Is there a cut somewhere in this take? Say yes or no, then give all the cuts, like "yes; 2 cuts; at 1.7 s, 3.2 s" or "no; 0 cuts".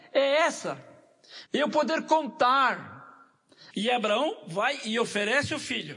yes; 2 cuts; at 1.5 s, 3.7 s